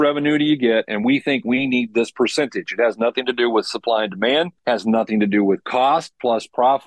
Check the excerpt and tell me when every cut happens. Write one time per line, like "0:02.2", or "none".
0:04.6